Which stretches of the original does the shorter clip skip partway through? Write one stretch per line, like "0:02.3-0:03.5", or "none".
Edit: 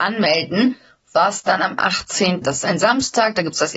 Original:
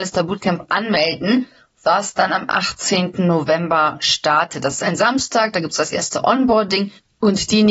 0:03.1-0:04.6